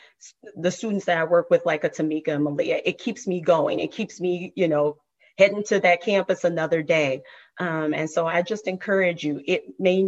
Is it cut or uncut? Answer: cut